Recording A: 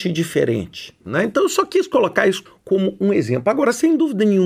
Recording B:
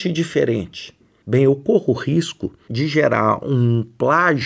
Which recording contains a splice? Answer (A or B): A